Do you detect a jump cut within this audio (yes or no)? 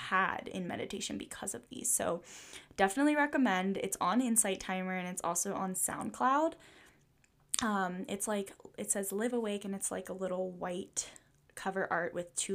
no